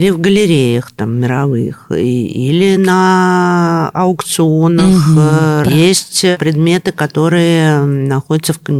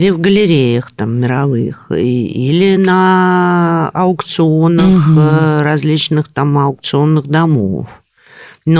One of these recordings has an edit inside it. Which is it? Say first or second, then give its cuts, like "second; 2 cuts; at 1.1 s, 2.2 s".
first; 1 cut; at 5.6 s